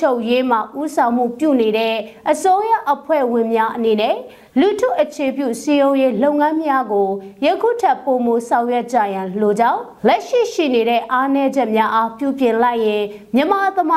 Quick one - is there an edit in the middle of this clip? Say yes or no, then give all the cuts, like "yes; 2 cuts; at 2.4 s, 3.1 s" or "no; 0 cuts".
yes; 1 cut; at 10.0 s